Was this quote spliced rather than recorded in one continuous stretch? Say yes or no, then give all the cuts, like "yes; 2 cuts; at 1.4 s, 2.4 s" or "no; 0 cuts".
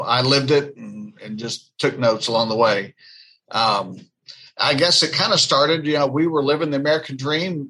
no; 0 cuts